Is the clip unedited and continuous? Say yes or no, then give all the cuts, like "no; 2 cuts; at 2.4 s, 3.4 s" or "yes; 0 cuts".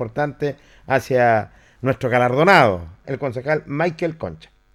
no; 1 cut; at 3.0 s